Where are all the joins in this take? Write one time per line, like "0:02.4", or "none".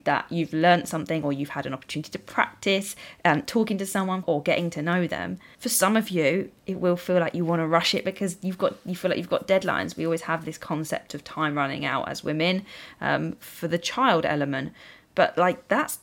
0:04.2
0:05.5